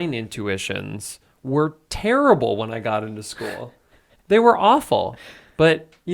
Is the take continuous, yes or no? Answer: yes